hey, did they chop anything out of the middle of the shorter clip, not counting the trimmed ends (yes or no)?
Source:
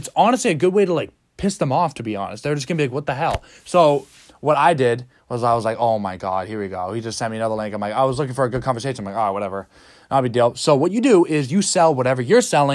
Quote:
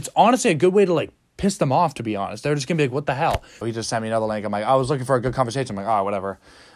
yes